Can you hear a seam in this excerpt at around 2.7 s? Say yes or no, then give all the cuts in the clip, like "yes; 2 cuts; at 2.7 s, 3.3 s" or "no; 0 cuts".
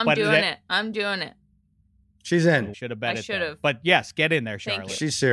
yes; 1 cut; at 2.7 s